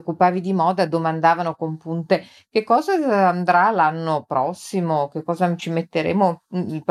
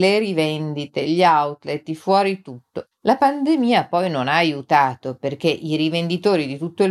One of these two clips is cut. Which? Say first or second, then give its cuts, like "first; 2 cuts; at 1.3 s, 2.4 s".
second; 1 cut; at 2.9 s